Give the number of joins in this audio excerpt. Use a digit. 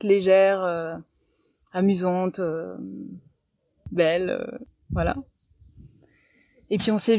0